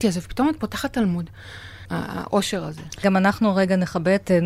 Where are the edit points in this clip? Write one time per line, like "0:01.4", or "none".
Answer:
0:01.9